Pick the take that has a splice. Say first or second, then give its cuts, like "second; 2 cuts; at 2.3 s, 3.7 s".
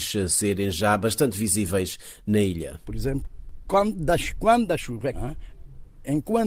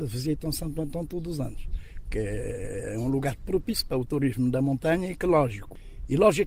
first; 2 cuts; at 2.8 s, 5.1 s